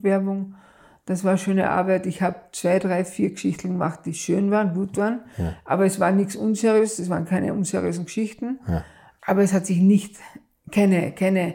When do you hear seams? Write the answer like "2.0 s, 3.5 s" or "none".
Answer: none